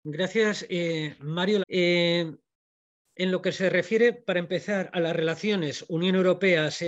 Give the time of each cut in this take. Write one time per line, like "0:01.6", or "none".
0:01.6